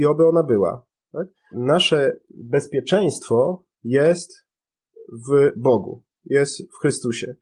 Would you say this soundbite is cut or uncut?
cut